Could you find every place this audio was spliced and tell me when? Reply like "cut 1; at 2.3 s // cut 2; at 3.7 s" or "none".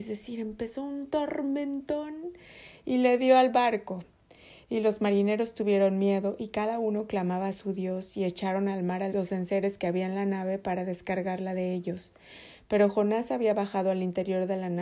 cut 1; at 9.1 s